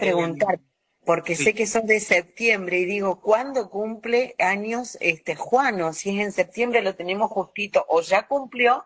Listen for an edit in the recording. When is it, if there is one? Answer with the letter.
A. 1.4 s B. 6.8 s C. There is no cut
C